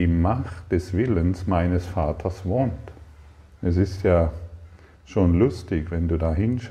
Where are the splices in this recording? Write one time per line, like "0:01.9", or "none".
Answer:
0:03.5